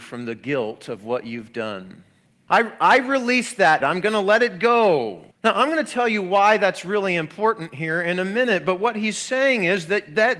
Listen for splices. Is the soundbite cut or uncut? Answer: cut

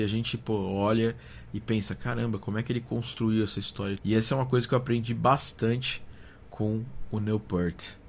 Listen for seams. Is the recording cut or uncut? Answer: cut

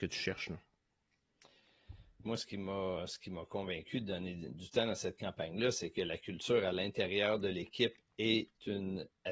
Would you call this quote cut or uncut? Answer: cut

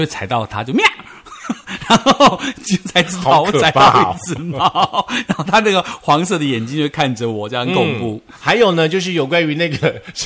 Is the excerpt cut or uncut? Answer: uncut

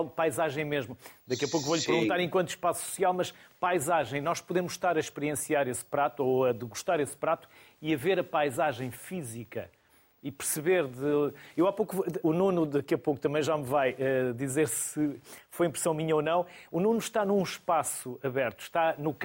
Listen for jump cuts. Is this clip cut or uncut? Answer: cut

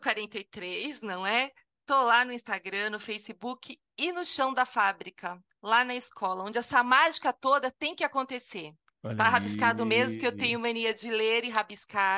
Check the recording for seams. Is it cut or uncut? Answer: cut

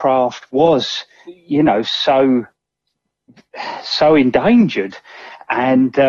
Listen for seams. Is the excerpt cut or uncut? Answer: cut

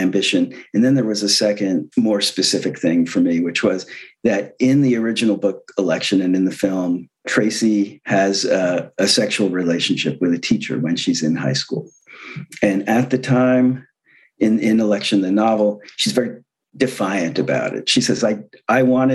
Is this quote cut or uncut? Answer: uncut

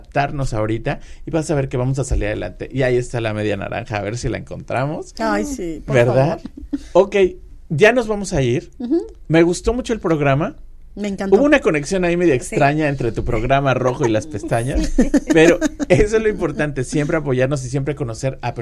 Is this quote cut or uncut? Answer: cut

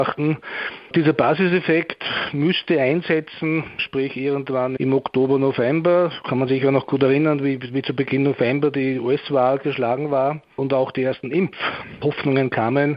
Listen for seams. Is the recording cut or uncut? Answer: uncut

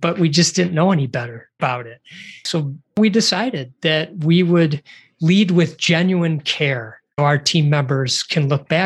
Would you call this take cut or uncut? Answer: cut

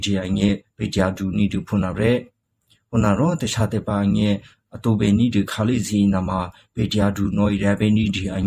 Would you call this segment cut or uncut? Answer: uncut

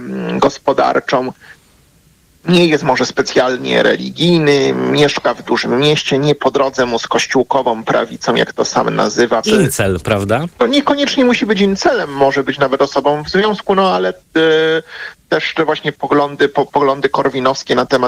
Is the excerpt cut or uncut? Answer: cut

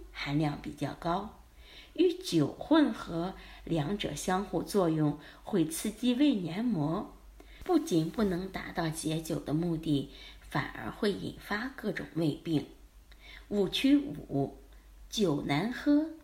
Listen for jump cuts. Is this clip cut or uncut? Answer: uncut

